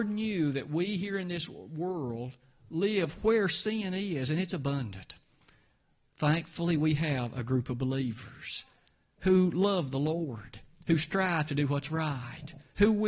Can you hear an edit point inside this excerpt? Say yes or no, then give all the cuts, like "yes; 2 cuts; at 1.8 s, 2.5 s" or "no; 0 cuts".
no; 0 cuts